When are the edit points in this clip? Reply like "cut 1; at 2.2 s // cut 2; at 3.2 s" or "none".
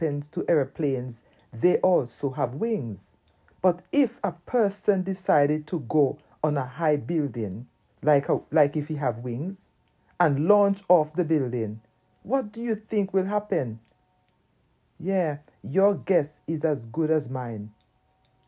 cut 1; at 7.8 s